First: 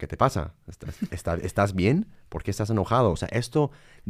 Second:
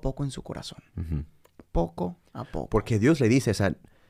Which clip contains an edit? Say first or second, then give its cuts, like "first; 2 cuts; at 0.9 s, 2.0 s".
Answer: first; 2 cuts; at 1.1 s, 3.1 s